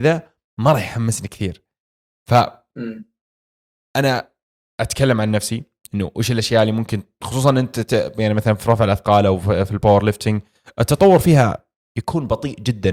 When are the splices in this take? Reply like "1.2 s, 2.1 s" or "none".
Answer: none

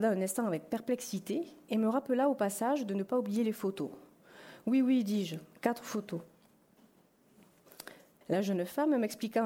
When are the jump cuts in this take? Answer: 8.2 s

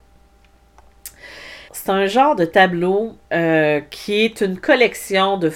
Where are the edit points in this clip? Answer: 1.7 s, 3.2 s

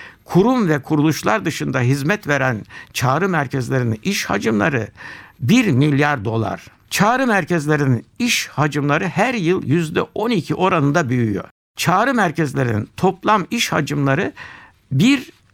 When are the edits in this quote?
6.8 s

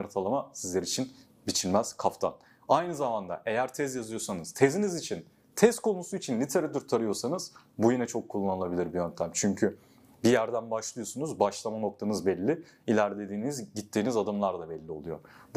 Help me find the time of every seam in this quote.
none

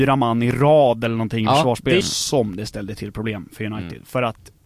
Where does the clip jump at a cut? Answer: 2.0 s

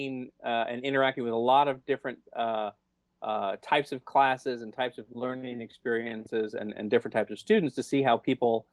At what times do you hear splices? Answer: none

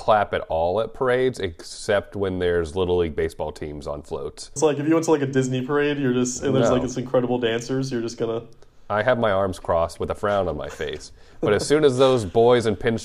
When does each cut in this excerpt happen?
4.6 s

